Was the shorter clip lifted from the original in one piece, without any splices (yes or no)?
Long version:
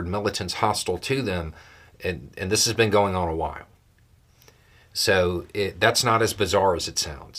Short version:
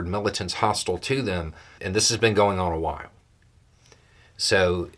no